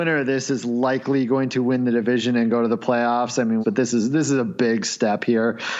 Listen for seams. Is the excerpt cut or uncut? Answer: cut